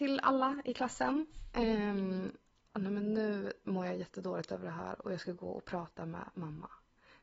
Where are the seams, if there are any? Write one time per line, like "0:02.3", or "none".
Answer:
0:02.7